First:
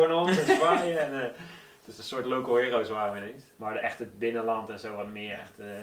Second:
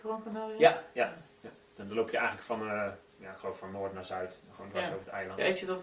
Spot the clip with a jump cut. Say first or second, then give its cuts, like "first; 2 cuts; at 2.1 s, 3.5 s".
first; 1 cut; at 3.5 s